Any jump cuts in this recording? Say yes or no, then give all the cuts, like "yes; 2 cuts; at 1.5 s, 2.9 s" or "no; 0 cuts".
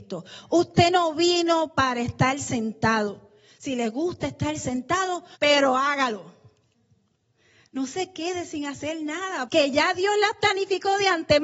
yes; 2 cuts; at 5.4 s, 9.5 s